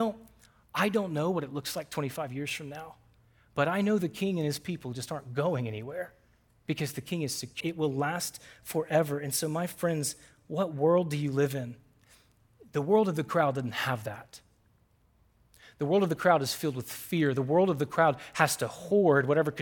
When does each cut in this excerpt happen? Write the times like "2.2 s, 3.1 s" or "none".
7.6 s